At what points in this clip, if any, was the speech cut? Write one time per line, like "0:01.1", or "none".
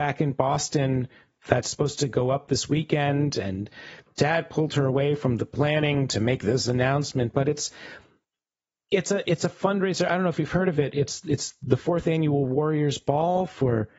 none